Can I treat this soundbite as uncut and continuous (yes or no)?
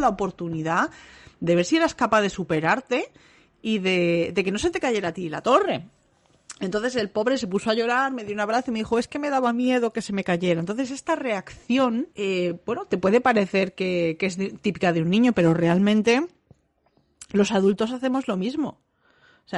no